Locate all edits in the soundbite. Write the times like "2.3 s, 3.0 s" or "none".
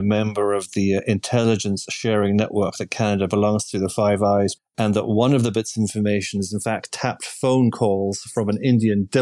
4.6 s

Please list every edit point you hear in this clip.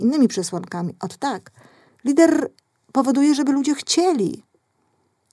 1.9 s

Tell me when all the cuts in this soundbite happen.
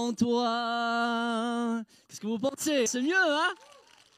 2.9 s

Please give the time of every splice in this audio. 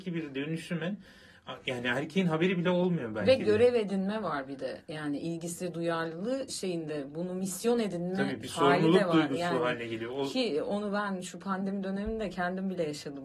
none

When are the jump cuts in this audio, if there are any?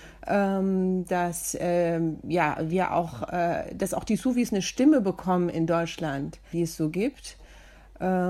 6.5 s

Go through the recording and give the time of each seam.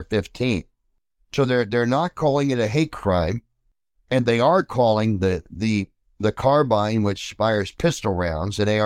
none

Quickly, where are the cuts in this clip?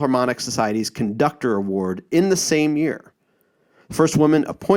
none

